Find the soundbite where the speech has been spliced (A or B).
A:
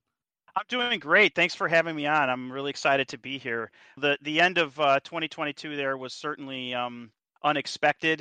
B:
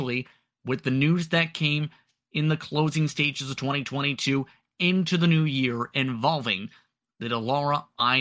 A